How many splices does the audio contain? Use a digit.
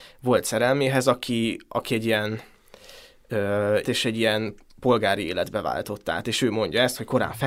1